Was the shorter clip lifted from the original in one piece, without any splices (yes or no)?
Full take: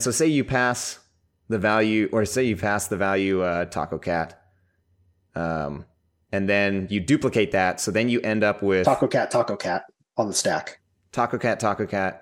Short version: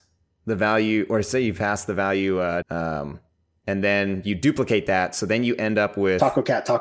no